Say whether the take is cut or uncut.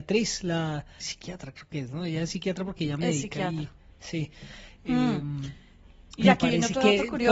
cut